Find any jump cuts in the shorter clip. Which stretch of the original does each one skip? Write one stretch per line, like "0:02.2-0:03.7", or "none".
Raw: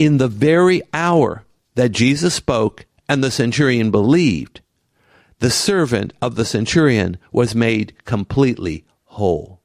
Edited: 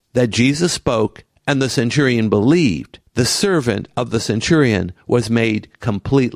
0:04.7-0:05.3

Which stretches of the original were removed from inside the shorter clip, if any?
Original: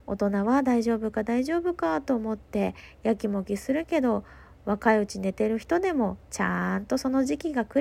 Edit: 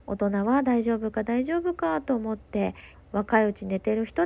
0:02.9-0:04.5

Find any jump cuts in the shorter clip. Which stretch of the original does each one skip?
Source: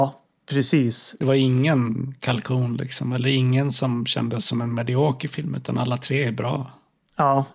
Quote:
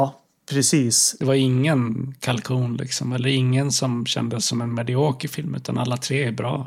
none

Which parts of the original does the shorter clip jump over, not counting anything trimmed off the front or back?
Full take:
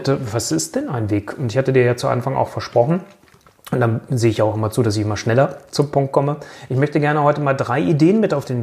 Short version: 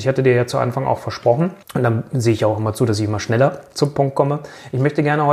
0:03.1-0:03.6

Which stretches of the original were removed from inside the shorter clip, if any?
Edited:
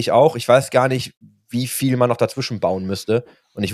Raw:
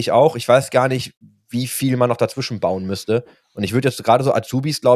none

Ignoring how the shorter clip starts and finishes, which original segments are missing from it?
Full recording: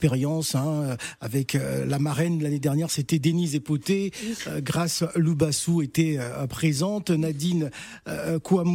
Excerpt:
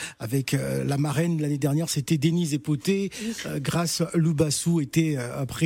none

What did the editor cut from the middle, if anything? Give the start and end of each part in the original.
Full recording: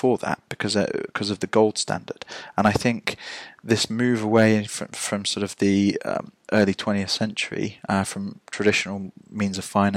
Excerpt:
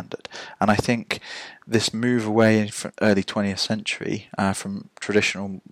0:04.9-0:06.4

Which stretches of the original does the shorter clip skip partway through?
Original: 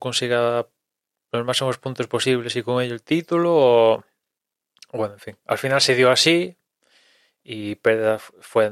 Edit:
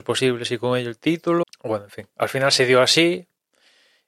0:03.5-0:04.7

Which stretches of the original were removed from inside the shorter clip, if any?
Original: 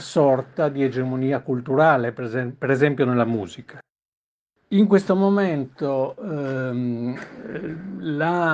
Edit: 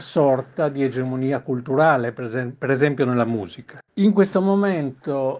0:03.9-0:04.6

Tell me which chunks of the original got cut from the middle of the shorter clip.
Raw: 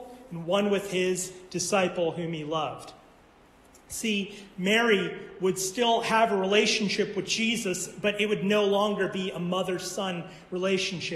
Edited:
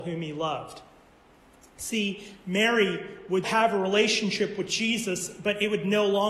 0:05.6-0:06.0

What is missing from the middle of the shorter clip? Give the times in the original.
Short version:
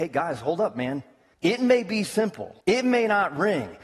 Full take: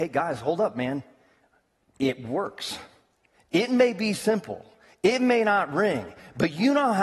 0:01.3-0:03.4
0:04.7-0:05.0

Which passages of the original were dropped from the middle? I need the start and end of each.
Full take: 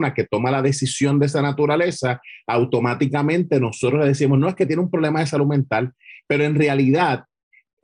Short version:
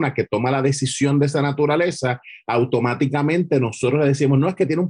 none

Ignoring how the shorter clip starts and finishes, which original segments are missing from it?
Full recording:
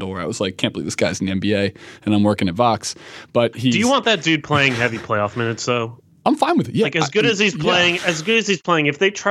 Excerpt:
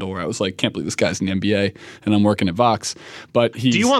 none

